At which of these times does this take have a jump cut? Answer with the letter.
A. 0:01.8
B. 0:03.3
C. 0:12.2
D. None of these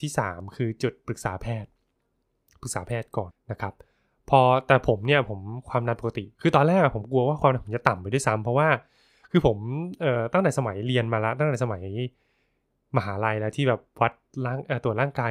B